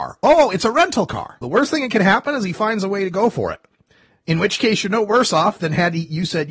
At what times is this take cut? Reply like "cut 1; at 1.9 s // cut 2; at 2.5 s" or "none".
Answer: cut 1; at 1.4 s